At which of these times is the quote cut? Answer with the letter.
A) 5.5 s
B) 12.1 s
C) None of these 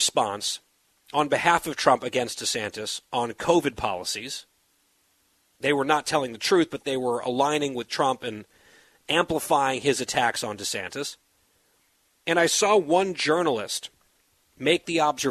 B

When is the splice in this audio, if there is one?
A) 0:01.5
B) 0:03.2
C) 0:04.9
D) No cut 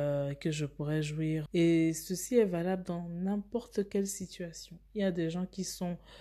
A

